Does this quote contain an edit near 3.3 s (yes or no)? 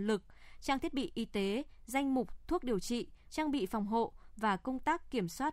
yes